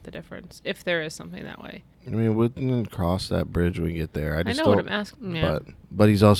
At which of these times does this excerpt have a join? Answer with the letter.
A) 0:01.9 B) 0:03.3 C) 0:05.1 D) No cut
C